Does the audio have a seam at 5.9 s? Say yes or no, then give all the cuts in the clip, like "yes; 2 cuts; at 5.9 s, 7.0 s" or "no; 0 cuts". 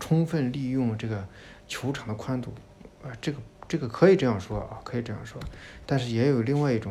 no; 0 cuts